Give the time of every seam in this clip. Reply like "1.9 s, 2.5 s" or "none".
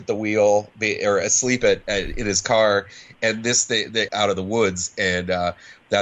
4.1 s